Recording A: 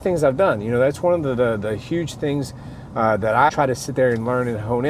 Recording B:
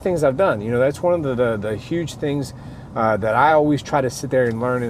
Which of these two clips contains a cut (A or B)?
A